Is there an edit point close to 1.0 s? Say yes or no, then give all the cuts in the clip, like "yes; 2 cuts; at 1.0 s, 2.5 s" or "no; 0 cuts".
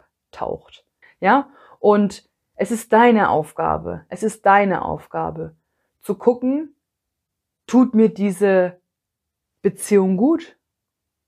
yes; 1 cut; at 1.0 s